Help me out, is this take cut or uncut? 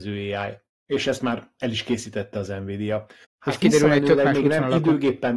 cut